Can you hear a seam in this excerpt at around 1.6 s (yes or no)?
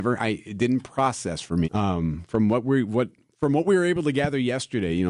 yes